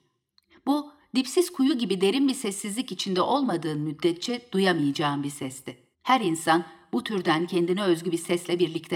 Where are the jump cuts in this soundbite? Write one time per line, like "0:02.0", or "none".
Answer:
0:05.9